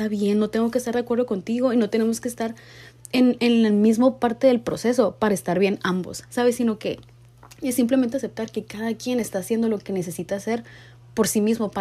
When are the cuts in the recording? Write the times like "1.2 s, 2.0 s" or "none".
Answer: none